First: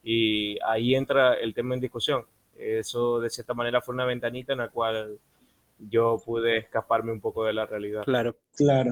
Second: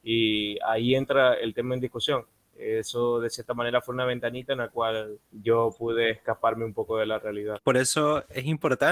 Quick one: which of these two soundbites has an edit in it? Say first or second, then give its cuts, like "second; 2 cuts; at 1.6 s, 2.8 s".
second; 2 cuts; at 5.2 s, 7.6 s